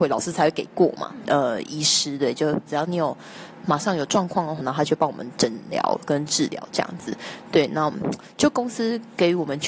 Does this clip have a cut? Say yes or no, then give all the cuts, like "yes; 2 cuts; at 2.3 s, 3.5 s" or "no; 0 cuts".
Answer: yes; 2 cuts; at 1.2 s, 4.6 s